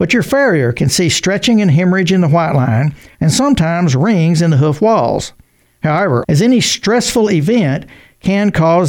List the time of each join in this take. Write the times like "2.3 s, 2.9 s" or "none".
3.1 s, 6.2 s